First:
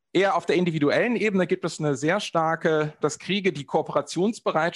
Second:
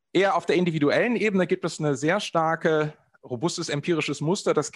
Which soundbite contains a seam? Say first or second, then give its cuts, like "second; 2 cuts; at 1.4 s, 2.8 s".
first; 1 cut; at 3.0 s